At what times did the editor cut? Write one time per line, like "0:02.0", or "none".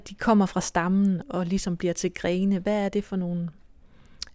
0:01.2